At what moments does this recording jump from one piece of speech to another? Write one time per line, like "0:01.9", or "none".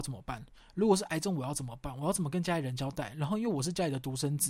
none